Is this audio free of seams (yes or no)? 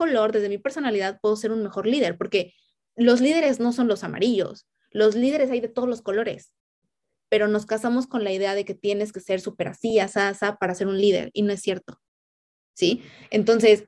yes